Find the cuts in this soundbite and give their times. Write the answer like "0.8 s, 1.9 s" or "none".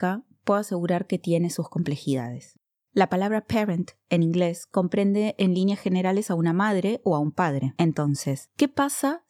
2.8 s

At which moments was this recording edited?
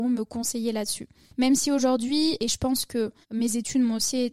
3.2 s

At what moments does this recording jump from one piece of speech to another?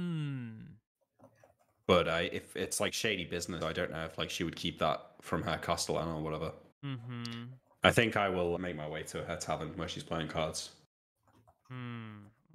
3.6 s, 6.7 s, 8.6 s

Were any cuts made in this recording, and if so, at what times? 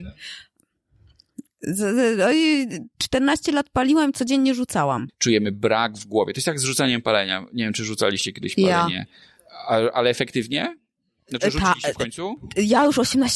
5.1 s

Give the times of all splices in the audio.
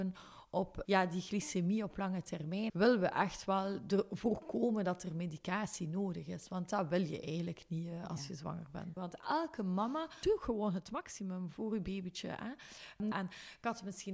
2.7 s, 9.0 s, 13.1 s

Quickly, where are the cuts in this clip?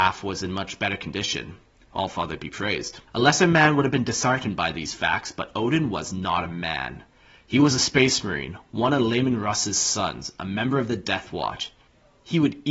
3.1 s

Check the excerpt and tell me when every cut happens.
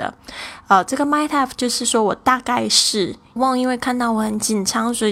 3.4 s

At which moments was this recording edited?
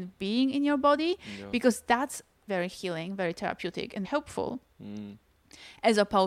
2.5 s, 4.0 s

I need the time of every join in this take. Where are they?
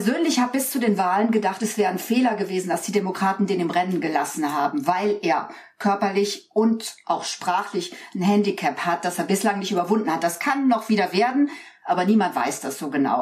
none

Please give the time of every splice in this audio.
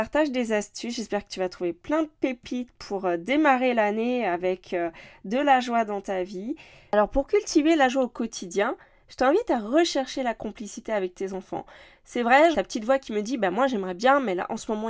12.5 s

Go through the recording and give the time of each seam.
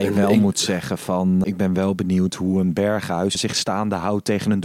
1.4 s, 3.4 s

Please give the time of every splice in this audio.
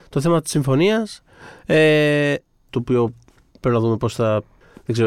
2.7 s

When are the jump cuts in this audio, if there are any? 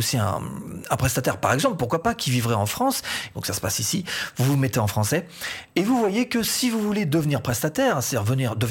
3.3 s

